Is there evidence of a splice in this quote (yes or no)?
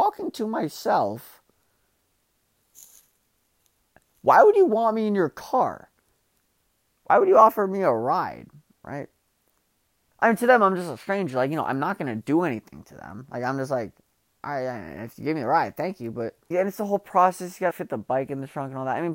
yes